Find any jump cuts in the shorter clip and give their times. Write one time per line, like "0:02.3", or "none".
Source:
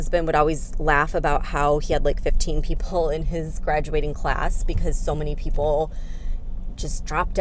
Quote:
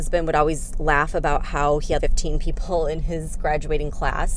0:02.0